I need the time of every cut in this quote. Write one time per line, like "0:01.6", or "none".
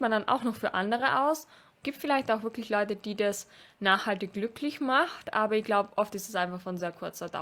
0:01.8